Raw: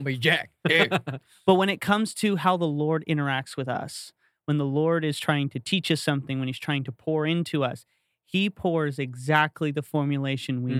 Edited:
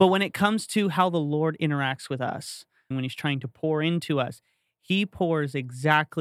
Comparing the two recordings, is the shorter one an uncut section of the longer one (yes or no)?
no